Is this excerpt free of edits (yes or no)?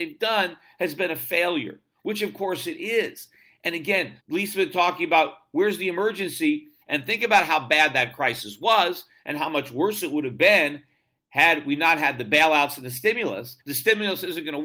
no